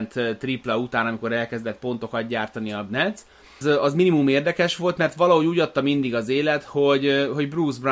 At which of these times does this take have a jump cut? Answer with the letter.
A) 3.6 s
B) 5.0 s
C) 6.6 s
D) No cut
A